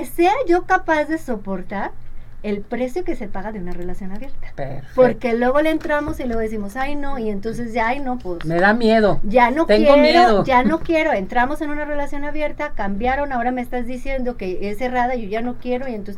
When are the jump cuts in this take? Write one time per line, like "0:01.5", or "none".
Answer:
none